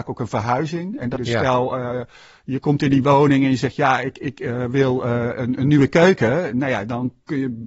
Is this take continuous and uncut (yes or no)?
no